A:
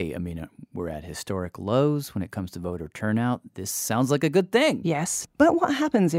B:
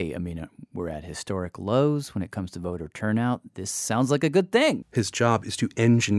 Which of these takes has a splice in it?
B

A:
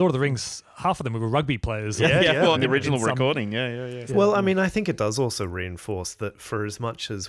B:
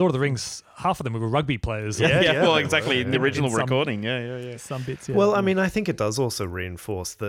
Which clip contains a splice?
A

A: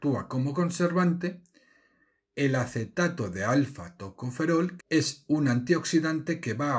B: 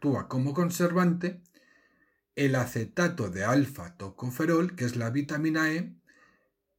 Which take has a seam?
A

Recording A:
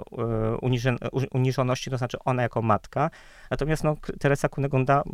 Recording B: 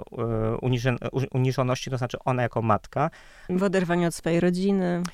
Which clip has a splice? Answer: B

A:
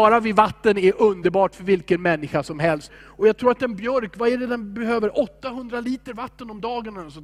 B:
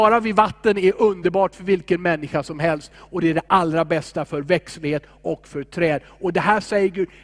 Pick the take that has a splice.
A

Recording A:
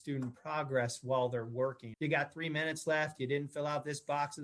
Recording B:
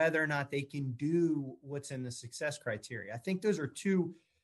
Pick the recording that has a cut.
A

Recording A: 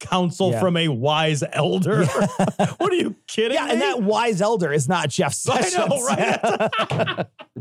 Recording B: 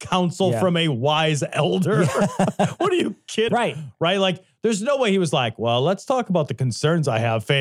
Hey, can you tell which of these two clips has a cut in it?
B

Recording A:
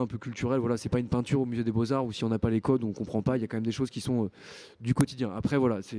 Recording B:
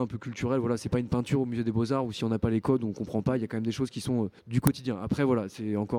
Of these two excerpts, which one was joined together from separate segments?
B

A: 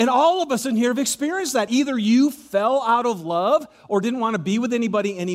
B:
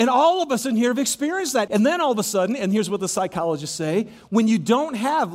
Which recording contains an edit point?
B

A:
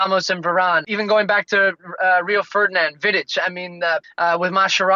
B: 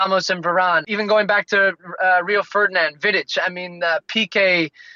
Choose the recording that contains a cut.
A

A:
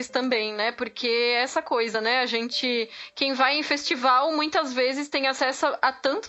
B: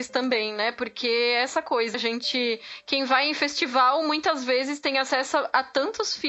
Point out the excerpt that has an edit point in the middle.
B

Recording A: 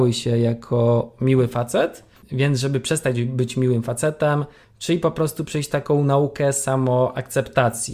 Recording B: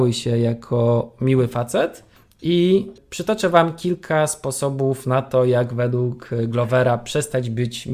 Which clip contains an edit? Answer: A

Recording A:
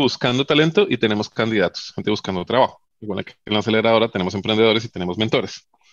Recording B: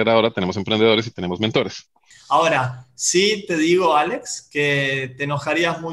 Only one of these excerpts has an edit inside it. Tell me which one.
B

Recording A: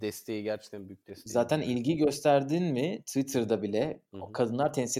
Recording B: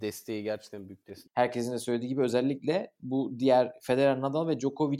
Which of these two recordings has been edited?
B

